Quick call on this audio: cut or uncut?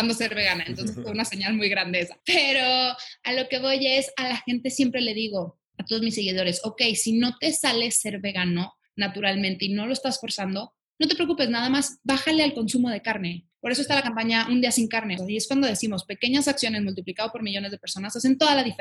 cut